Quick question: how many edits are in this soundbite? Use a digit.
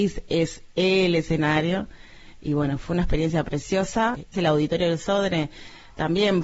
1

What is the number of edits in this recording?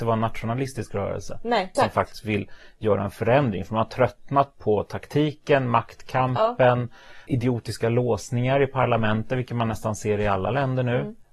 2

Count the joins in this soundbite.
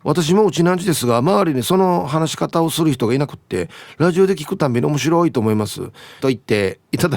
1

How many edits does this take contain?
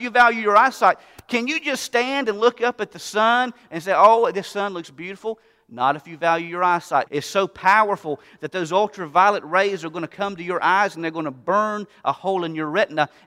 1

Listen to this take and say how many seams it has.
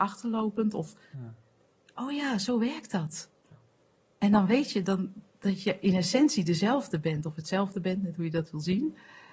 0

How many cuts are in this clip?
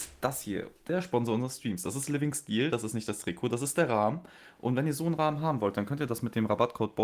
0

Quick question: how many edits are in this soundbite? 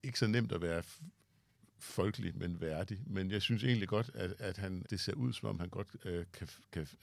1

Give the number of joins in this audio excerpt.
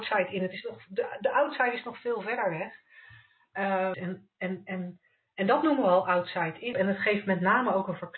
2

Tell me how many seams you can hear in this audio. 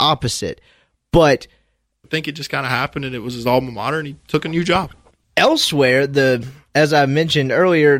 1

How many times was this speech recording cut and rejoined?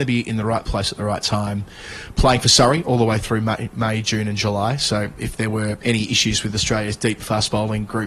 0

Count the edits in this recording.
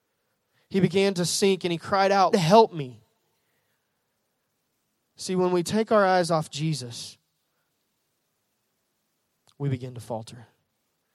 1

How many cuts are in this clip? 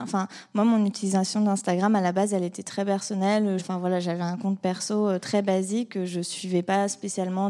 1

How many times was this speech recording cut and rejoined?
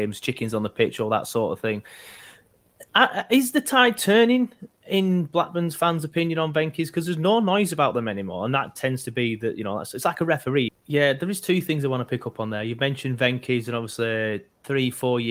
1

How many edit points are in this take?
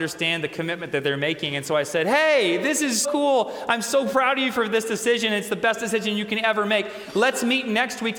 1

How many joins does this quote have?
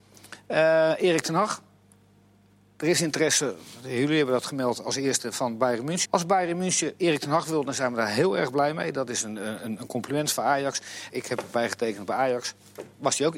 3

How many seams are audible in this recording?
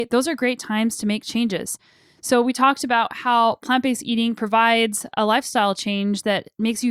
0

